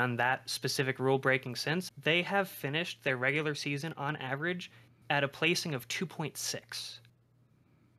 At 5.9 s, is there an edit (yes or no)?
no